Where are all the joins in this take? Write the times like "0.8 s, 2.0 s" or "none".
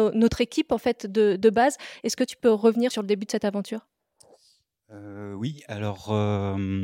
2.9 s